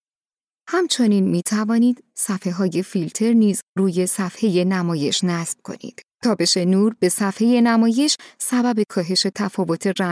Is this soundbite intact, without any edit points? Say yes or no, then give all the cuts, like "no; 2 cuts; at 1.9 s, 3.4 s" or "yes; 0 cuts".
no; 1 cut; at 6.1 s